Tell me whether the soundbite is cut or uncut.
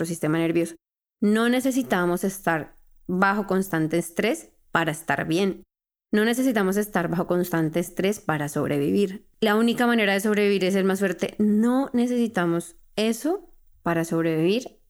cut